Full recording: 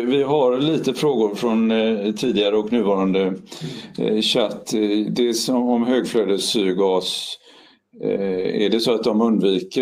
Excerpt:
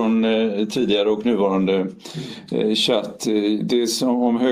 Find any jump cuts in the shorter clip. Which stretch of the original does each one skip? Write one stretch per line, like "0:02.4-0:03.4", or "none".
none